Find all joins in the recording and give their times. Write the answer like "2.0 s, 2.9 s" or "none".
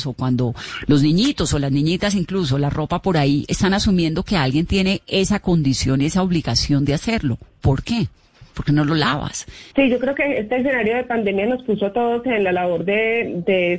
8.5 s, 9.7 s